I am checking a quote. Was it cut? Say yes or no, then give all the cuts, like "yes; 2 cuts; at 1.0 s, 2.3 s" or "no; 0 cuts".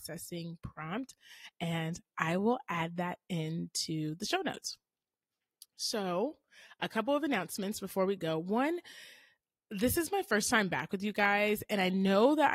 no; 0 cuts